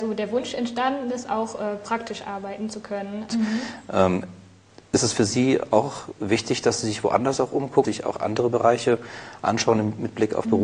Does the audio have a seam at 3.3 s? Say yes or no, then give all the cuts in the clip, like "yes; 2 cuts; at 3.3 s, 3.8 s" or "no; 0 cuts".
yes; 2 cuts; at 3.3 s, 7.8 s